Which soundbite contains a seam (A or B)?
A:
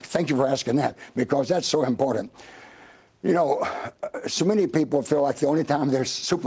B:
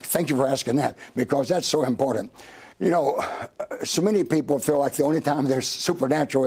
B